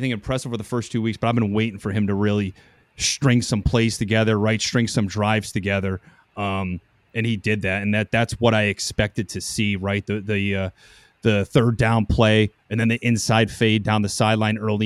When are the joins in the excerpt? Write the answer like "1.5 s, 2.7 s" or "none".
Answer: none